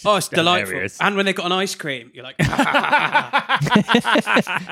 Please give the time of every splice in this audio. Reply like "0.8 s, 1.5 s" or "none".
none